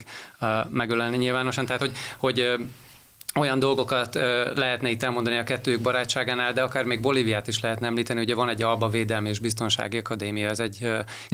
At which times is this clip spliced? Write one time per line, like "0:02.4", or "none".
none